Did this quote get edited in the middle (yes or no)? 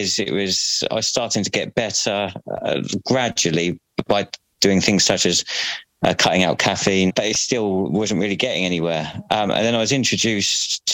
yes